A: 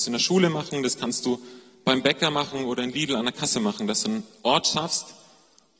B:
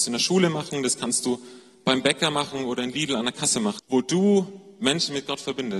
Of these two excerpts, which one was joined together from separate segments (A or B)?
B